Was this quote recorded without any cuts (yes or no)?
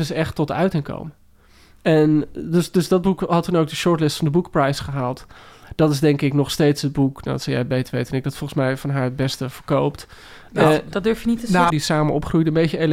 no